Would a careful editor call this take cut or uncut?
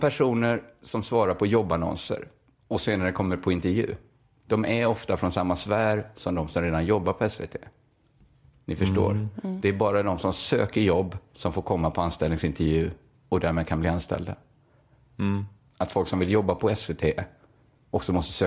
cut